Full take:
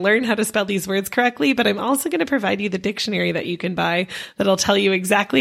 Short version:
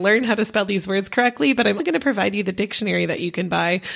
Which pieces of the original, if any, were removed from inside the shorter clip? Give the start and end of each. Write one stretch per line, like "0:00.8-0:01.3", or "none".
0:01.8-0:02.0